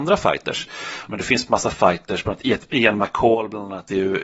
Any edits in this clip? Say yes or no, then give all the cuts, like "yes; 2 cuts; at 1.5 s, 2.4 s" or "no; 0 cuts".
yes; 1 cut; at 1.1 s